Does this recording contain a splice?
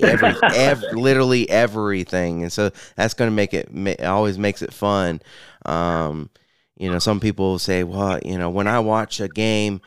no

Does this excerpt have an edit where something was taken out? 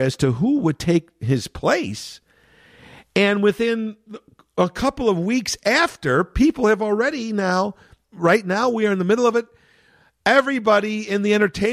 yes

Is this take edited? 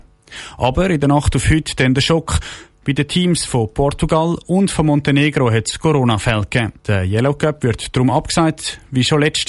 yes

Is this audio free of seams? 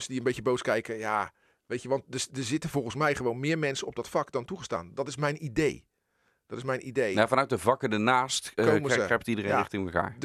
yes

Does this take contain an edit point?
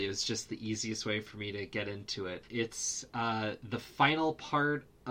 yes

